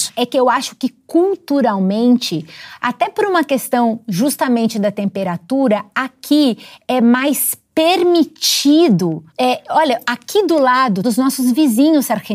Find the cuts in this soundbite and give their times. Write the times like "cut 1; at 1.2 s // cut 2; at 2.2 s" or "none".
cut 1; at 9.3 s // cut 2; at 11.0 s